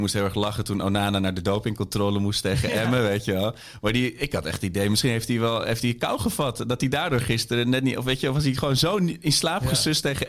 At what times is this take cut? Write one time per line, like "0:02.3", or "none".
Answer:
none